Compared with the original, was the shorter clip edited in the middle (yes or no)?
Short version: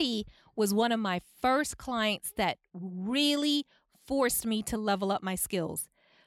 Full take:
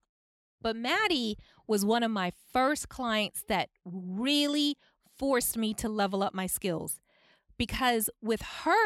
no